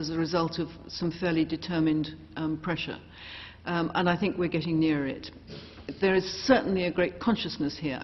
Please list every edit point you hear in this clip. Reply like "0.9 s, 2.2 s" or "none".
none